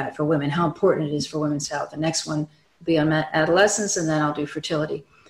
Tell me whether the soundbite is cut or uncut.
uncut